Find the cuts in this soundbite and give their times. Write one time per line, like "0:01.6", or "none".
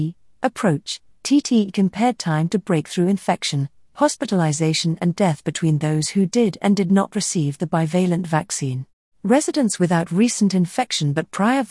0:09.1